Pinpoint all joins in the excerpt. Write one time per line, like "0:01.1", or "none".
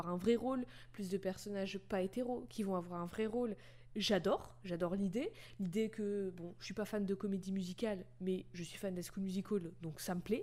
none